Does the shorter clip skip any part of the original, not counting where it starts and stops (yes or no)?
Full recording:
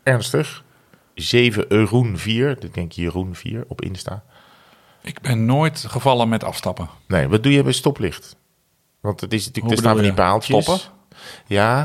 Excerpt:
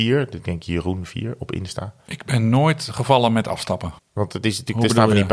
yes